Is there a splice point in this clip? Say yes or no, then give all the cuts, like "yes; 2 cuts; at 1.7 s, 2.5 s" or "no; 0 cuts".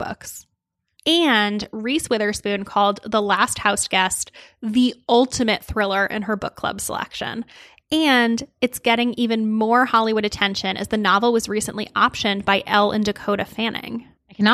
yes; 1 cut; at 1.0 s